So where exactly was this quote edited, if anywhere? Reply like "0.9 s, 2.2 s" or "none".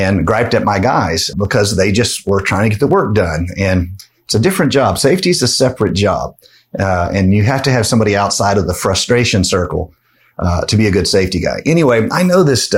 1.3 s